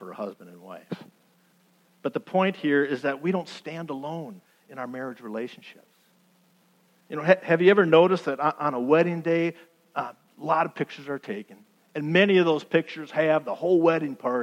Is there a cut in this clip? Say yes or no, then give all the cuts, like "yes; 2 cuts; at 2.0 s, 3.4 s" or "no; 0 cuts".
no; 0 cuts